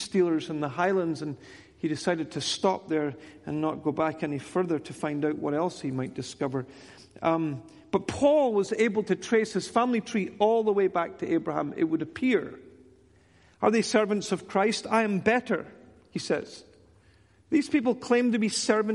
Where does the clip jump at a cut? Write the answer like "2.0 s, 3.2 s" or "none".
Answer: none